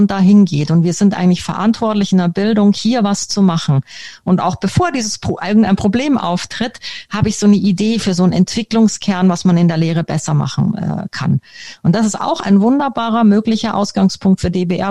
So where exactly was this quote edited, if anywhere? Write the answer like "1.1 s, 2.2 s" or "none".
none

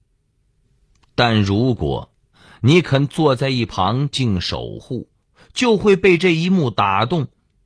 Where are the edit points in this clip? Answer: 4.1 s

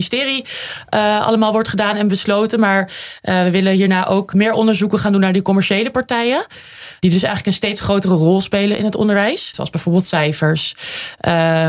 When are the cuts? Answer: 9.5 s

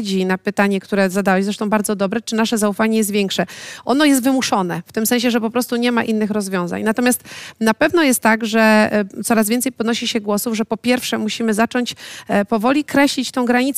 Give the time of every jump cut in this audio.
none

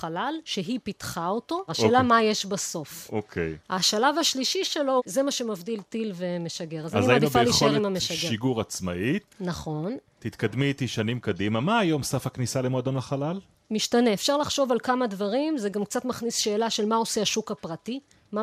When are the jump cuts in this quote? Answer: 1.7 s

